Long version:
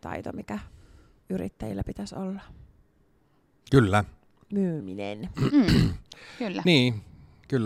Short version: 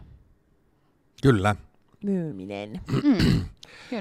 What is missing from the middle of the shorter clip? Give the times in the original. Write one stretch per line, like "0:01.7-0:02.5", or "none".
none